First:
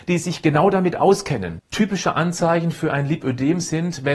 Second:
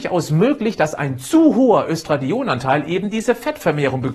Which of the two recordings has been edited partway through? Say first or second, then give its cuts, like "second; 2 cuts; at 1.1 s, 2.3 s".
first; 1 cut; at 1.6 s